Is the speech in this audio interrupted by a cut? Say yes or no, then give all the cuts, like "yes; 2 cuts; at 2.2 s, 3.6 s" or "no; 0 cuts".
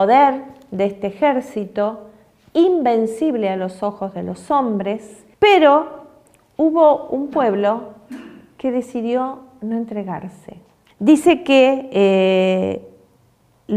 yes; 2 cuts; at 5.3 s, 10.9 s